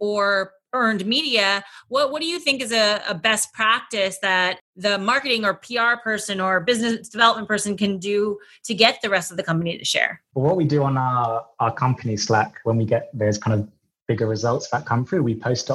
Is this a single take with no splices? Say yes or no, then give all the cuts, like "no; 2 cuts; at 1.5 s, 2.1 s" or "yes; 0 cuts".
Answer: no; 1 cut; at 10.3 s